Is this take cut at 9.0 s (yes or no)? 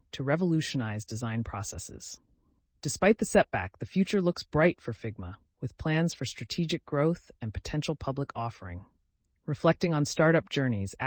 no